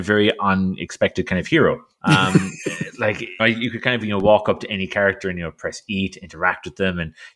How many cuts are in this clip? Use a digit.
2